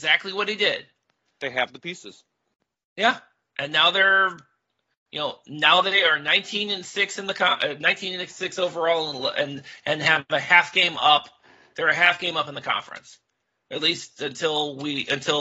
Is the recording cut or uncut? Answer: uncut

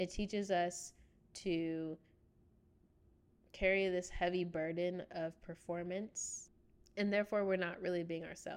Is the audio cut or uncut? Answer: uncut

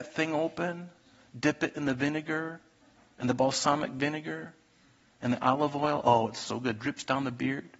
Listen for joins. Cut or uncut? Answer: uncut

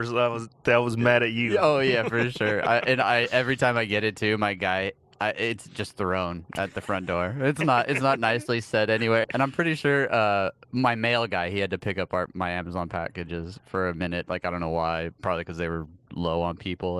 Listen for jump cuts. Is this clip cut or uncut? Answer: cut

